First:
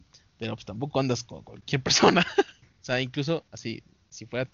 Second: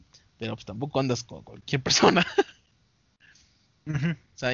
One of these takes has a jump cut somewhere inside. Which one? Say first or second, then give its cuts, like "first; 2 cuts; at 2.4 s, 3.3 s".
first; 1 cut; at 2.6 s